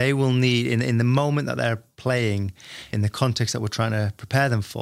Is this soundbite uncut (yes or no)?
no